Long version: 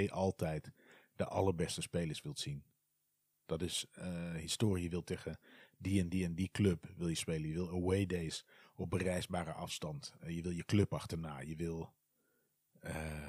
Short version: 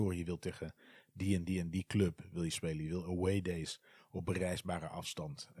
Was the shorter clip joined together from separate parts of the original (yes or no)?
no